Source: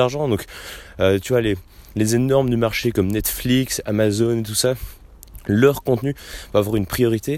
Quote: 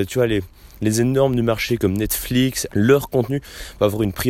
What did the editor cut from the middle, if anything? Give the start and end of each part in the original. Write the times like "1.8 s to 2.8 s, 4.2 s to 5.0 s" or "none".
3.8 s to 5.4 s